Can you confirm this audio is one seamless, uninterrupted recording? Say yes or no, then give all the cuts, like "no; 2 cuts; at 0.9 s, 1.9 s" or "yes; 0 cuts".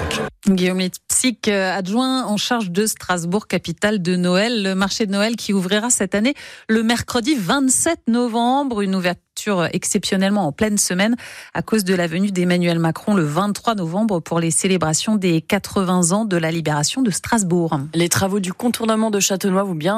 yes; 0 cuts